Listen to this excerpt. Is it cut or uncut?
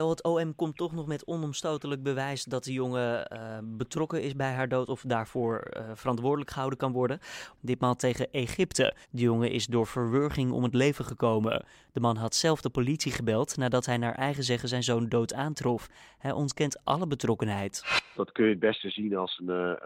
cut